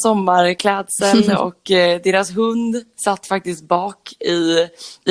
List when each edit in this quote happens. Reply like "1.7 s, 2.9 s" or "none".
none